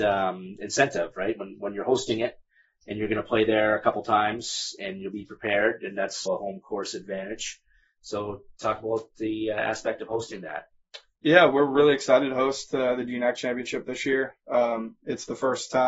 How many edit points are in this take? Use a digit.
1